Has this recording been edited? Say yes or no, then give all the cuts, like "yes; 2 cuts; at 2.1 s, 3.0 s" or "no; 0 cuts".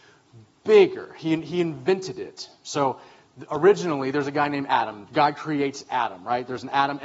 no; 0 cuts